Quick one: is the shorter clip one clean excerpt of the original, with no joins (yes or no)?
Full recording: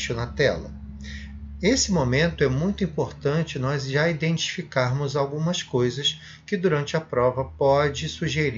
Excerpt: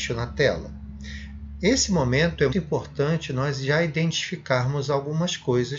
no